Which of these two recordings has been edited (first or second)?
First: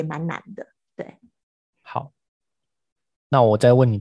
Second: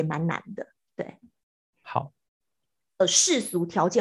second